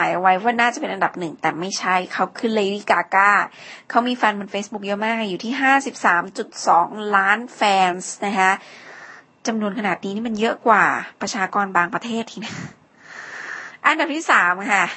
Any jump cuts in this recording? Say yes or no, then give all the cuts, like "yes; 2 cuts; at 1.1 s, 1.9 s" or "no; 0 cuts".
no; 0 cuts